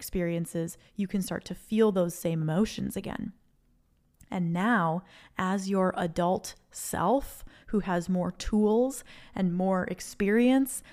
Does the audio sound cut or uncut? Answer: uncut